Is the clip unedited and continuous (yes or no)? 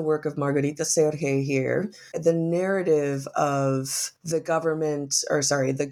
no